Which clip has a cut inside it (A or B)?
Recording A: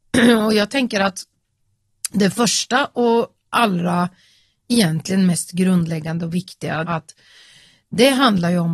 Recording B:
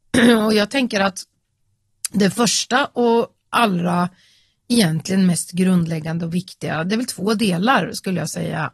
A